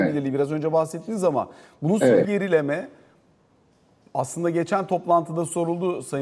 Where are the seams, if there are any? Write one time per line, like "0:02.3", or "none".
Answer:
0:02.2